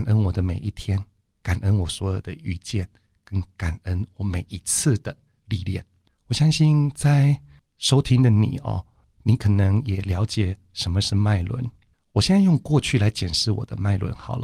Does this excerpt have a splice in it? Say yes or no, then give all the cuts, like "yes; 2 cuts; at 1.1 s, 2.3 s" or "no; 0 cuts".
no; 0 cuts